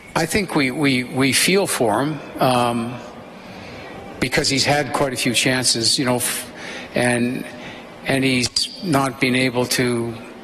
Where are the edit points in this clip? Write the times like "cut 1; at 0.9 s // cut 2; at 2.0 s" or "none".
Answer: none